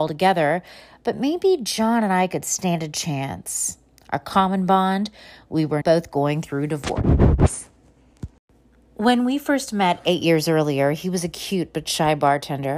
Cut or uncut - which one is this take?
cut